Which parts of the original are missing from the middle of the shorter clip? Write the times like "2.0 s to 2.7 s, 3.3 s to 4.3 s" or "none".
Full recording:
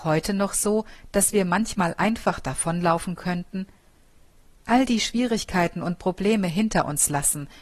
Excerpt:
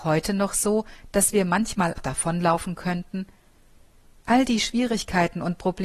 2.0 s to 2.4 s